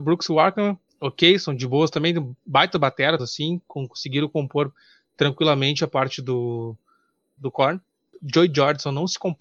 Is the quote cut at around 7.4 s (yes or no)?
yes